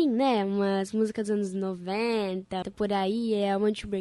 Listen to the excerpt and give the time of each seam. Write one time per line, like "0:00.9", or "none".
0:02.6